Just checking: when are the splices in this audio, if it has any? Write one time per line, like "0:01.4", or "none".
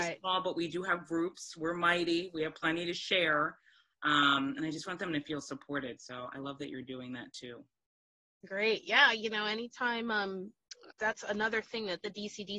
0:10.9